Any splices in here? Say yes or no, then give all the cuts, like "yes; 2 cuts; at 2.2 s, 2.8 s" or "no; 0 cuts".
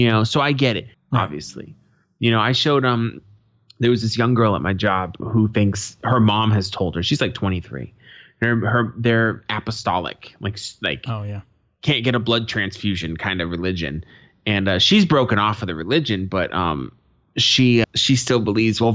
yes; 3 cuts; at 0.9 s, 5.2 s, 17.8 s